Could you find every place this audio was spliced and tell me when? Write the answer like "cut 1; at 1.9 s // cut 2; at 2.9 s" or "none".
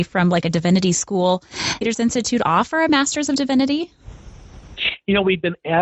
cut 1; at 1.8 s